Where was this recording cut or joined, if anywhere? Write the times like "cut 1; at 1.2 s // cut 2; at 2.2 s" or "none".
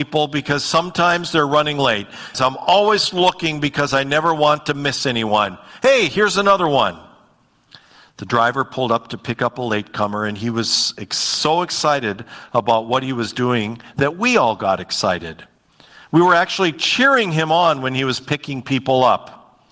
cut 1; at 2.3 s